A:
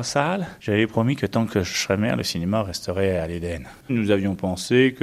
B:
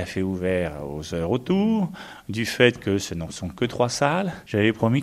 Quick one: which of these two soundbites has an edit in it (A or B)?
A